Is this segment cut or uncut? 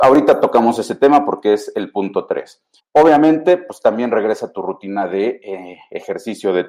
cut